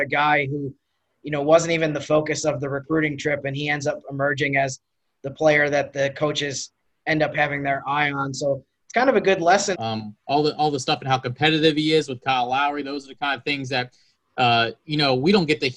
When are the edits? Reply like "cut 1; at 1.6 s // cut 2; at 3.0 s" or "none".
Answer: cut 1; at 9.7 s